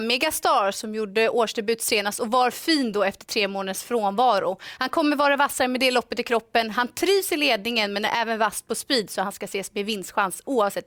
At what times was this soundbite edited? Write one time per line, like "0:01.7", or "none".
none